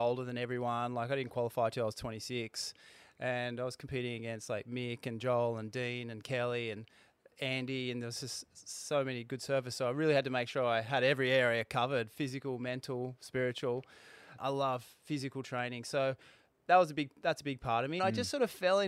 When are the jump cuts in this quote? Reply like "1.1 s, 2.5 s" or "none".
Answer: 14.4 s, 18.0 s